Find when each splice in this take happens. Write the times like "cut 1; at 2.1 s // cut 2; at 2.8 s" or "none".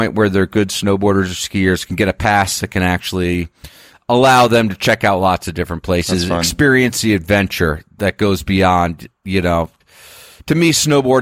none